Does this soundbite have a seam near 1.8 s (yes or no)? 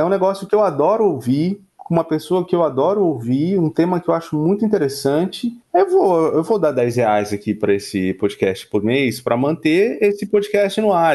no